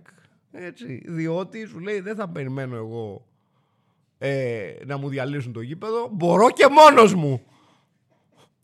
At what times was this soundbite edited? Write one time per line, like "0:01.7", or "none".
none

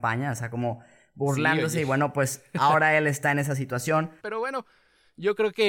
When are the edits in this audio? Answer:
0:04.2

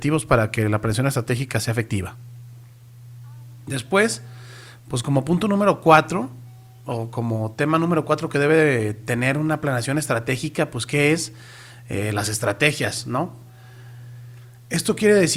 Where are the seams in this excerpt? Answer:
none

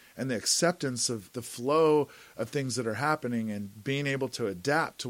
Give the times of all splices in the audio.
0:01.3

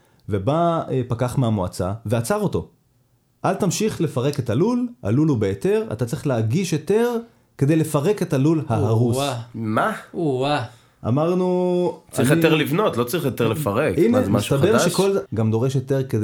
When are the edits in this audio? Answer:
0:15.3

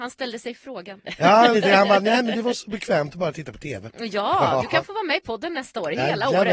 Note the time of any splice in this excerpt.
0:01.5
0:03.9

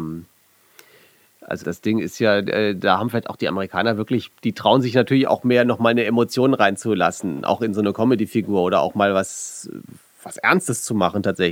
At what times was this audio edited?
0:01.6

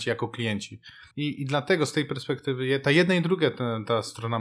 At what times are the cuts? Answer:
0:01.1

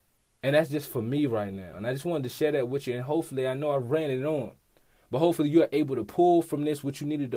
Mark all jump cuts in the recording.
none

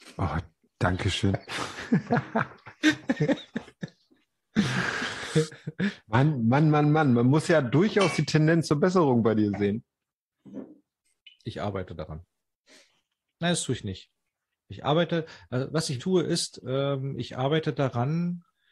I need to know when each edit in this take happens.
0:16.0

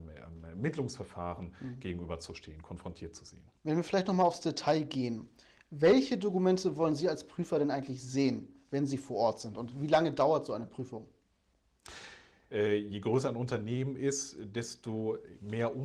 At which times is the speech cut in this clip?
0:03.6
0:12.5

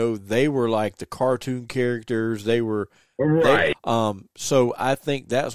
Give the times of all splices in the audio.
0:03.7

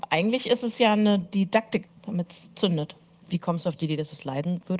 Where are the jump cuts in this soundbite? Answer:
0:01.9

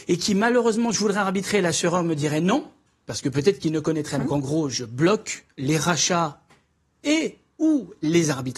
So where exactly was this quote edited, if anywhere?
0:04.2

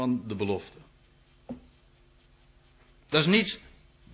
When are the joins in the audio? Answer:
none

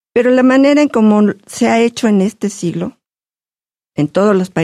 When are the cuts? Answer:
none

